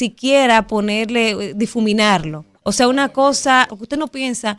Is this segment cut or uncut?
cut